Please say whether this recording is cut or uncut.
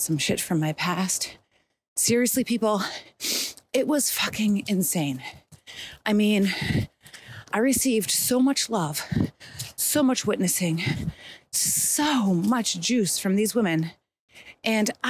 cut